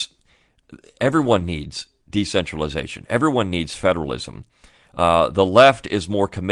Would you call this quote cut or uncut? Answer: uncut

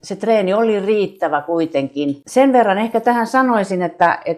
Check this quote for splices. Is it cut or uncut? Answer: uncut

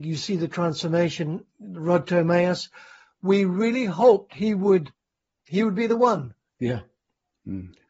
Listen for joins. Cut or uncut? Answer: cut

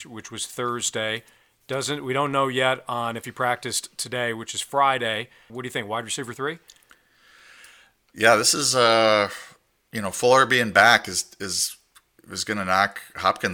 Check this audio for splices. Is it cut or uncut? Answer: cut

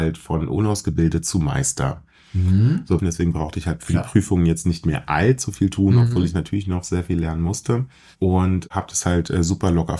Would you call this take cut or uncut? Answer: cut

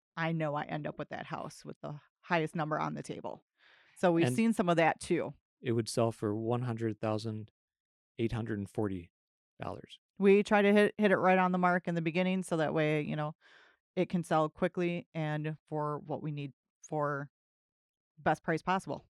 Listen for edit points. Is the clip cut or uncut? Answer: cut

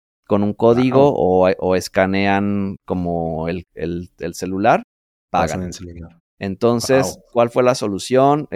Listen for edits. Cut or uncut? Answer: cut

